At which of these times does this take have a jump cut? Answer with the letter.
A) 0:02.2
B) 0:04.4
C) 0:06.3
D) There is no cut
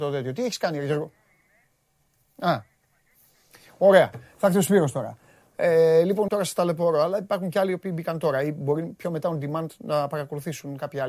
C